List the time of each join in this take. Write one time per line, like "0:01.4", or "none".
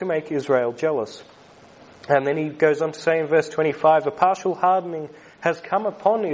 none